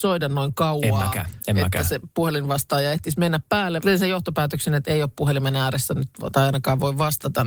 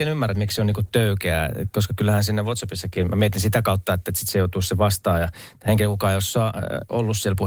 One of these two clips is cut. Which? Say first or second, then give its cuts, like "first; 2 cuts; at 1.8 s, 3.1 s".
first; 1 cut; at 3.8 s